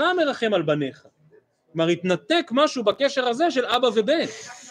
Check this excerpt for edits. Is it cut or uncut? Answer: uncut